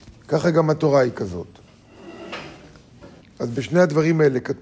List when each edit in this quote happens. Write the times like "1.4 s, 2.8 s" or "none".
3.2 s